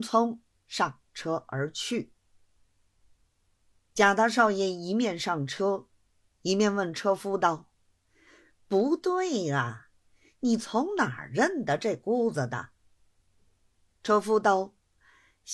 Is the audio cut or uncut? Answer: uncut